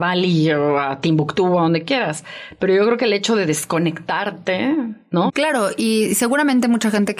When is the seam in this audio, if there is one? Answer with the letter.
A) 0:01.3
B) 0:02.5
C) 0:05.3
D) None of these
C